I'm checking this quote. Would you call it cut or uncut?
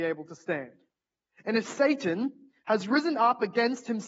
uncut